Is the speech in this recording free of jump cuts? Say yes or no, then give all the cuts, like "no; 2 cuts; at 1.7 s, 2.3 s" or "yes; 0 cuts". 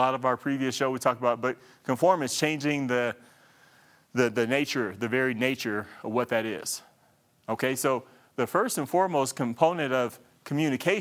yes; 0 cuts